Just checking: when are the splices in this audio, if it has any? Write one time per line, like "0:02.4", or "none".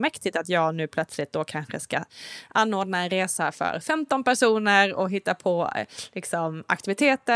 none